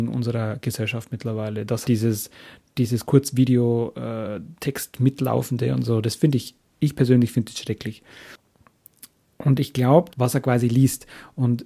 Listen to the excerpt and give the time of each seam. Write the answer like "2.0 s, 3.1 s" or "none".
1.8 s, 10.1 s